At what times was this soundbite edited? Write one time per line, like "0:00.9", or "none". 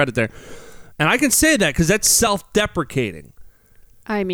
0:00.9